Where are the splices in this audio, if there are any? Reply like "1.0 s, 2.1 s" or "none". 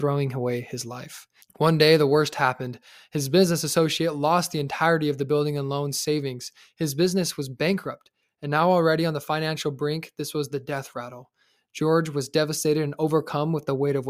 1.4 s